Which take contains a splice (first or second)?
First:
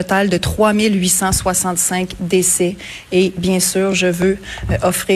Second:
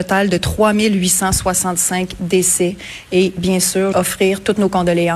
second